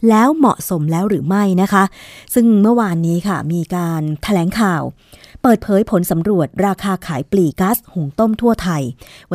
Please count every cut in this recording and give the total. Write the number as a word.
one